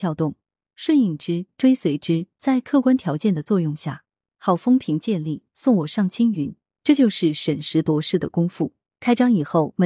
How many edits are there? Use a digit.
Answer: 1